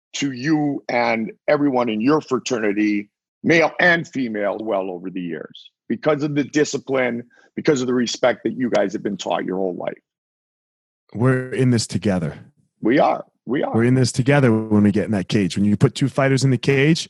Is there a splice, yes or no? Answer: yes